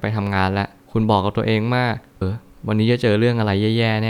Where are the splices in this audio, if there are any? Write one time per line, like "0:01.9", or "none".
0:02.2